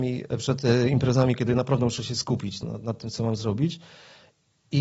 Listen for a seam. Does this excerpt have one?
yes; 2 cuts; at 1.4 s, 2.6 s

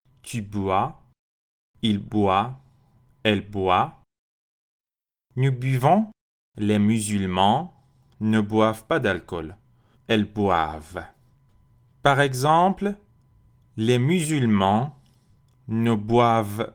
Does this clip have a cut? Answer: yes; 2 cuts; at 6.5 s, 9.9 s

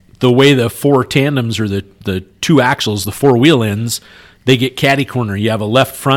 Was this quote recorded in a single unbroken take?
yes; 0 cuts

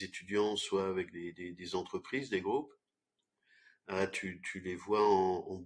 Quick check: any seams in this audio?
no; 0 cuts

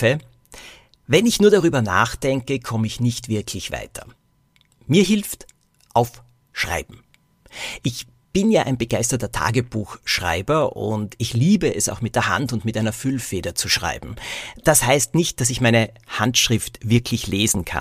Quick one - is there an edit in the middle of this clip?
no; 0 cuts

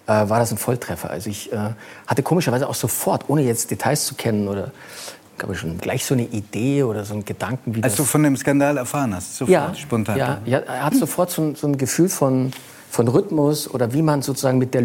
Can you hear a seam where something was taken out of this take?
yes; 1 cut; at 5.8 s

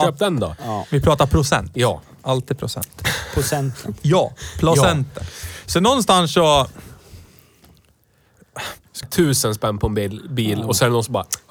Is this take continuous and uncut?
no; 1 cut; at 9.0 s

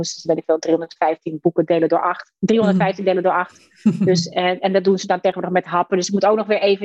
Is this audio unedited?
yes; 0 cuts

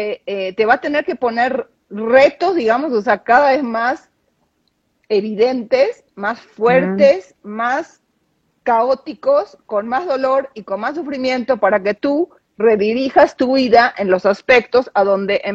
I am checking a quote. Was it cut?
no; 0 cuts

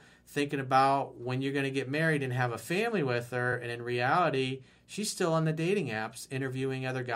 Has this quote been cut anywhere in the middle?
no; 0 cuts

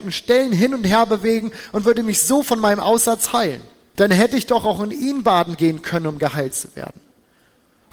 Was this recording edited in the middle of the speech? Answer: yes; 1 cut; at 4.0 s

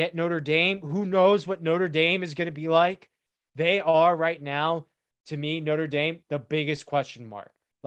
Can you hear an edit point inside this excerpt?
no; 0 cuts

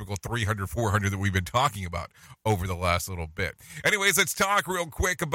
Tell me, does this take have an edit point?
no; 0 cuts

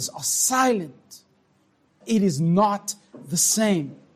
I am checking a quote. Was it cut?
yes; 1 cut; at 2.0 s

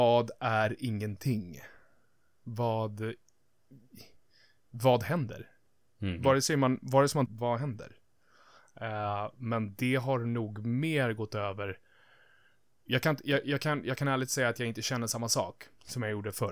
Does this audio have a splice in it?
yes; 1 cut; at 7.3 s

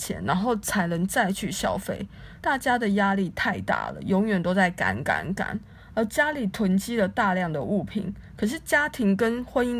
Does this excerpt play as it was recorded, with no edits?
no; 1 cut; at 2.4 s

